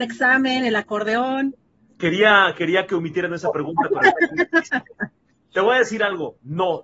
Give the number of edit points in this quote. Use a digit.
0